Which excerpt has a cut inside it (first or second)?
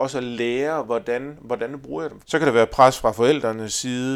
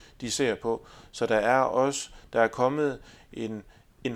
first